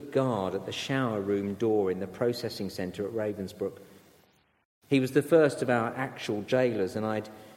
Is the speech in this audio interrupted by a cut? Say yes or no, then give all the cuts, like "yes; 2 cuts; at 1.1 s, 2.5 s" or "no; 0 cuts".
no; 0 cuts